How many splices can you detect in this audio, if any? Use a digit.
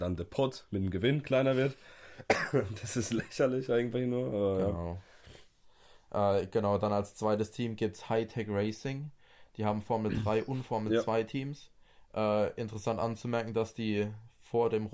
0